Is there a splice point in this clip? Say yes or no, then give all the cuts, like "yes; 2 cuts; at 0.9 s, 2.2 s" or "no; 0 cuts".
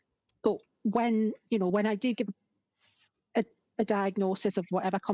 no; 0 cuts